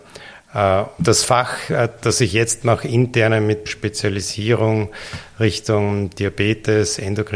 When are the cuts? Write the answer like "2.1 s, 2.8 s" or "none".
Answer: 1.0 s, 3.7 s